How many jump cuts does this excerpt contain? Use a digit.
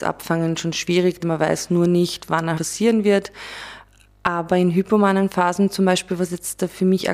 2